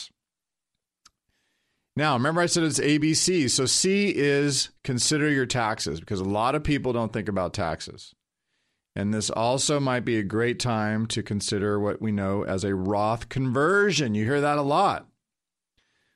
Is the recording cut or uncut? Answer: uncut